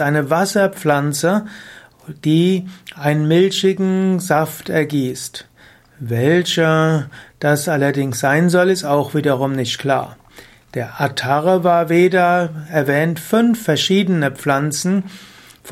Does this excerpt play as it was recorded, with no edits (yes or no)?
yes